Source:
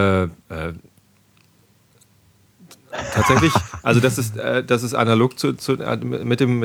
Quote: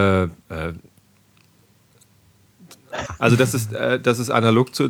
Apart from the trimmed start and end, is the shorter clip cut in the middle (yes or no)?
yes